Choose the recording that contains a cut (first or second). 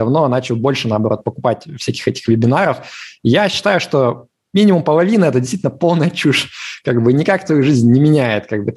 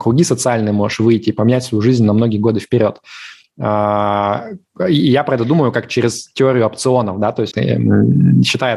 second